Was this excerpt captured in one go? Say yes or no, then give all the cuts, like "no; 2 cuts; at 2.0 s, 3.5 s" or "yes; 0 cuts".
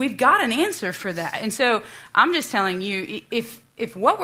yes; 0 cuts